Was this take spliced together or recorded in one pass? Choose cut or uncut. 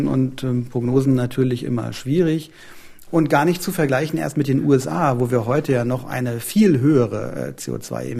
cut